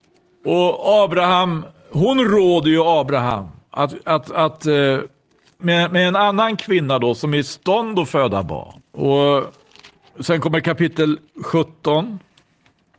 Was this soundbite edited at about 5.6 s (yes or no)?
yes